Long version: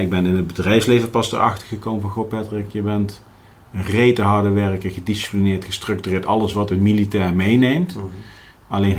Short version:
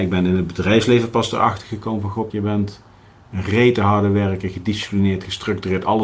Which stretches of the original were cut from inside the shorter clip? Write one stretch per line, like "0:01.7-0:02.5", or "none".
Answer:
0:02.3-0:02.7